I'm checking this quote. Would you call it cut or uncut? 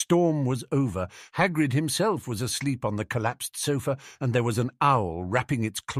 uncut